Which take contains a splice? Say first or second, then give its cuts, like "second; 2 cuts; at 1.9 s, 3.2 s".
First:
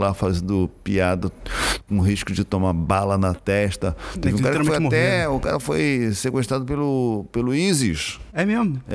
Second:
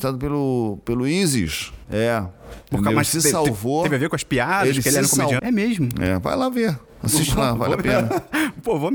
second; 2 cuts; at 1.8 s, 5.4 s